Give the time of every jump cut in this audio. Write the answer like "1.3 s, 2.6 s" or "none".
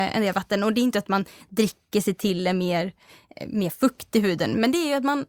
none